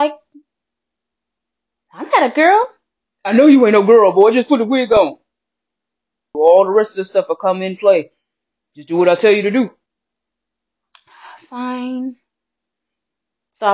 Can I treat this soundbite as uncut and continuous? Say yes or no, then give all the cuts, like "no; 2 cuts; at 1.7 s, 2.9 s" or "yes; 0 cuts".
no; 1 cut; at 6.3 s